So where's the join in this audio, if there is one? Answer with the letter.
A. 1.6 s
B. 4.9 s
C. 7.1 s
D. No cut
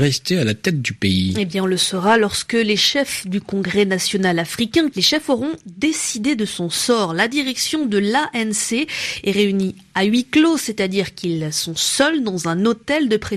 B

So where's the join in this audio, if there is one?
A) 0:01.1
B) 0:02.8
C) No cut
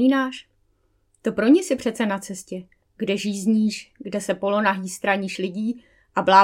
C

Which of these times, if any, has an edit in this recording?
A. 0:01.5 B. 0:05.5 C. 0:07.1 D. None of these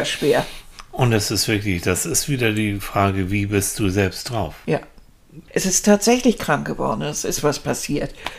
B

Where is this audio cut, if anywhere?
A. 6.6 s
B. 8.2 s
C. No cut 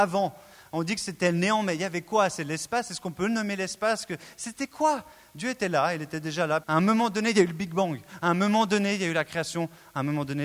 A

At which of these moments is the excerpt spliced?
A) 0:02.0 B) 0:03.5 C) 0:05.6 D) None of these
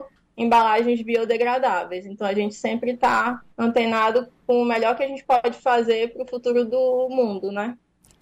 B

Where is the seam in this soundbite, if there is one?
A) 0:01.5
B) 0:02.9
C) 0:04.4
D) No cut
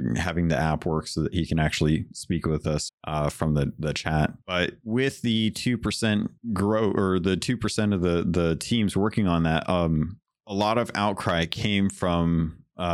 B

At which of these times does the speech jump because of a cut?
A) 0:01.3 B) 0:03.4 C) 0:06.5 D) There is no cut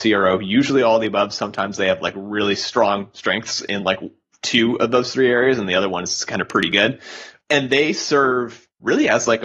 D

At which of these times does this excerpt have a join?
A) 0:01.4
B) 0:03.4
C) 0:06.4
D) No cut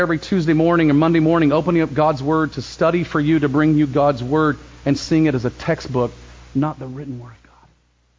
D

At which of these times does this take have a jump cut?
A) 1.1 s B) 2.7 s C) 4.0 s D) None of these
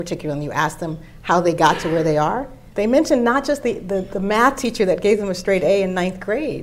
B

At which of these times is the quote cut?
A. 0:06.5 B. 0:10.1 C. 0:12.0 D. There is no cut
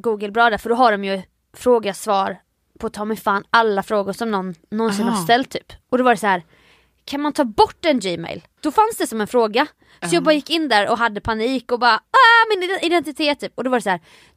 D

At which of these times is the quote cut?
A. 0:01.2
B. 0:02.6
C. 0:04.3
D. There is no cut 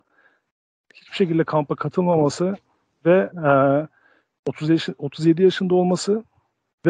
D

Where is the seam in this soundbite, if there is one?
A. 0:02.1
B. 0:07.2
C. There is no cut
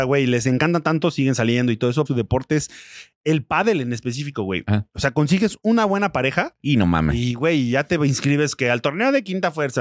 A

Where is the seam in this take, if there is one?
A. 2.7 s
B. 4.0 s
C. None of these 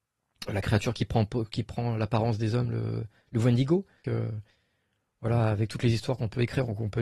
B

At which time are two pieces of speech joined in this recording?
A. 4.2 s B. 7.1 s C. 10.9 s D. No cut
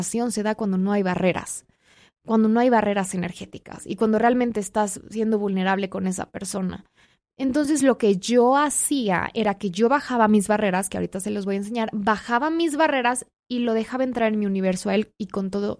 D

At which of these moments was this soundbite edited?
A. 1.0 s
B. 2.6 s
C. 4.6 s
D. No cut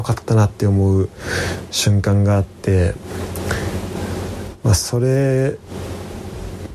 D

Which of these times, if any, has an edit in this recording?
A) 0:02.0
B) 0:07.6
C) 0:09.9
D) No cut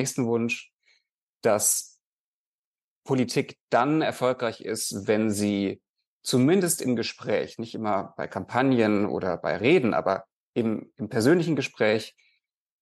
D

